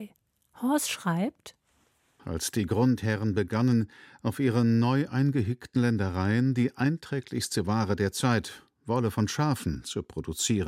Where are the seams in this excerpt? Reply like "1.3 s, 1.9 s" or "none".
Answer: 2.2 s